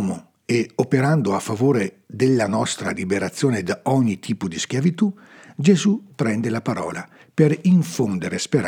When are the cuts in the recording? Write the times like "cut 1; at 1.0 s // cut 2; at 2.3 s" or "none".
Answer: none